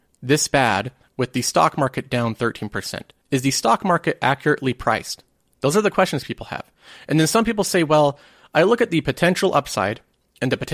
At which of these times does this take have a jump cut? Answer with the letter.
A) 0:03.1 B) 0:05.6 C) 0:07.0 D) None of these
D